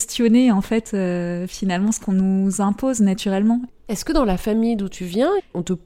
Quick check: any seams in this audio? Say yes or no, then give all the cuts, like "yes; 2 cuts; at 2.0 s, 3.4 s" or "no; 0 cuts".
yes; 1 cut; at 3.7 s